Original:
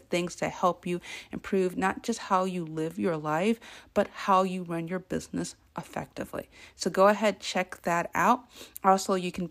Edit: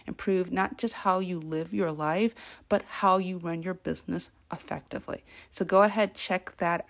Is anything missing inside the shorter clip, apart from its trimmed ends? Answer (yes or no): no